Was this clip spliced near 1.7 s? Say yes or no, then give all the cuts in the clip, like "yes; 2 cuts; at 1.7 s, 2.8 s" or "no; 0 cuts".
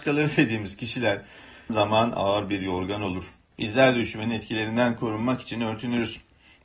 yes; 2 cuts; at 1.7 s, 3.5 s